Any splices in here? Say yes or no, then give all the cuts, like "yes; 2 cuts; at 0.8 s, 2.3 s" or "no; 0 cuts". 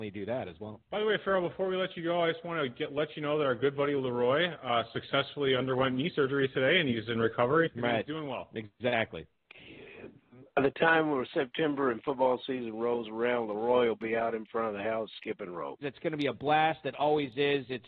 yes; 2 cuts; at 7.7 s, 15.8 s